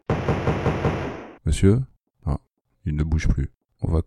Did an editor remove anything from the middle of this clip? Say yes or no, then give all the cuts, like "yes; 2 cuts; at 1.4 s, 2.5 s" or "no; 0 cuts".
yes; 1 cut; at 1.4 s